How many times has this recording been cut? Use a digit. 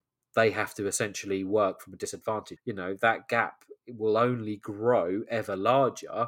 1